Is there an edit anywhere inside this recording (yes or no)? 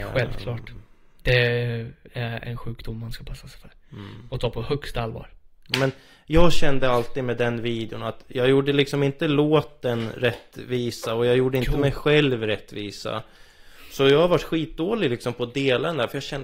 yes